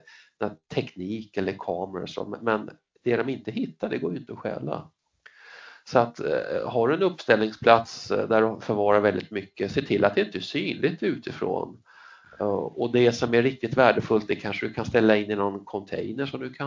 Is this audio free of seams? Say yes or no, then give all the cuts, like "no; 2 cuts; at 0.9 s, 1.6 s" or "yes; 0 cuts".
yes; 0 cuts